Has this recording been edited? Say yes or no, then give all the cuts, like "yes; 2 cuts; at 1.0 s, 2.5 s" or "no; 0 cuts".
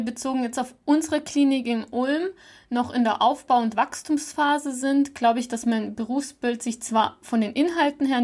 no; 0 cuts